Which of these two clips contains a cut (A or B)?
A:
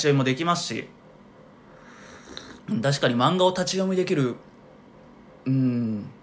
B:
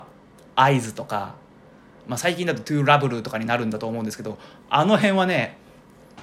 A